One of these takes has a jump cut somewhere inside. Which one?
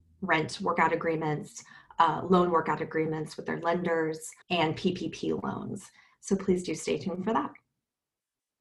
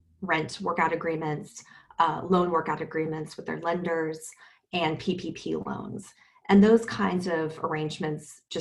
first; 2 cuts; at 4.4 s, 6.1 s

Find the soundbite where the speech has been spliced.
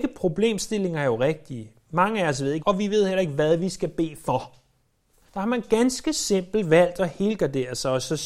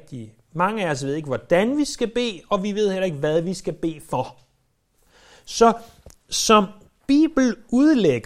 first; 2 cuts; at 2.6 s, 5.3 s

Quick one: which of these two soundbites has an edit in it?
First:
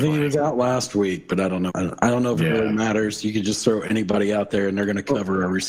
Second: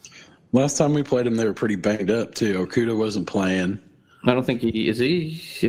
first; 1 cut; at 1.7 s

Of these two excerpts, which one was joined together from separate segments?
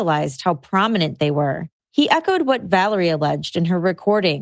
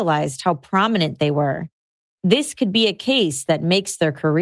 first; 1 cut; at 1.8 s

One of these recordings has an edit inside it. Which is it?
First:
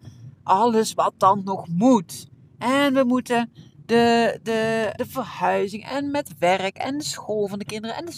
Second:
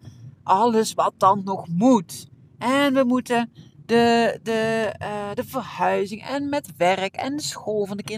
first; 1 cut; at 5.0 s

